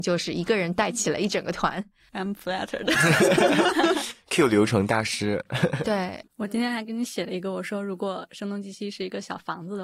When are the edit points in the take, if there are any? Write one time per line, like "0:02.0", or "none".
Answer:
0:06.3